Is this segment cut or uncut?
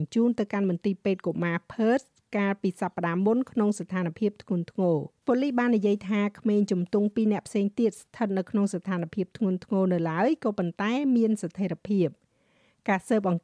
cut